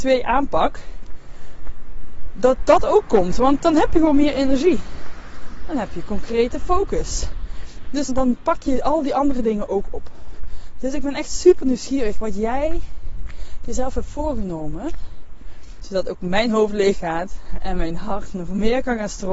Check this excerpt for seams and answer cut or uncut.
cut